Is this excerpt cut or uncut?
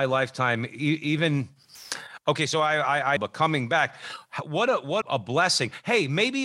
cut